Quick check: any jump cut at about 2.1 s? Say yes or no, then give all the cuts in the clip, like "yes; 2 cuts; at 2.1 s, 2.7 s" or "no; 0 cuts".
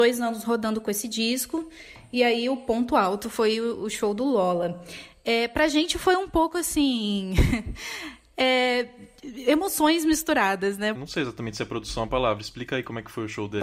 no; 1 cut; at 10.9 s